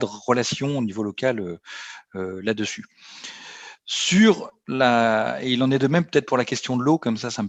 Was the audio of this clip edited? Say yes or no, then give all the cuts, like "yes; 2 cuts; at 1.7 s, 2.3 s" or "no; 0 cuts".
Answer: no; 0 cuts